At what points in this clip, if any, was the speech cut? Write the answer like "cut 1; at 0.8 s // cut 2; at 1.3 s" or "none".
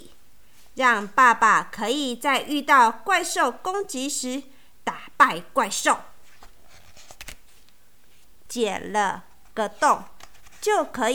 cut 1; at 8.5 s